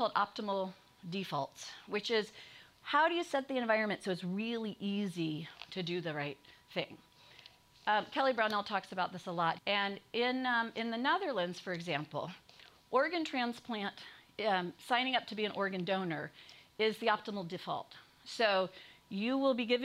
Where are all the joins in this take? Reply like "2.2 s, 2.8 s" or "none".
9.6 s